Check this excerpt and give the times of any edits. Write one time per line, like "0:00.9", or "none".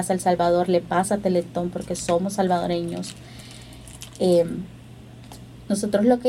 none